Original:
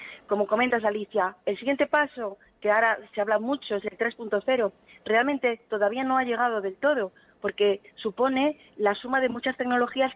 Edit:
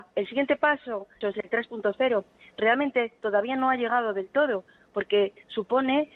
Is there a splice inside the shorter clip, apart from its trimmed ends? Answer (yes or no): yes